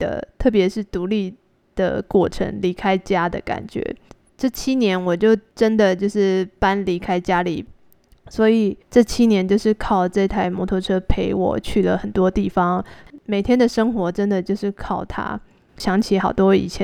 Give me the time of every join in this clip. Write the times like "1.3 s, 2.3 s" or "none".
8.8 s